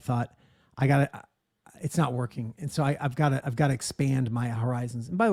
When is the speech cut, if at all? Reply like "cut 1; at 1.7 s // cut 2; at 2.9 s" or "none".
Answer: none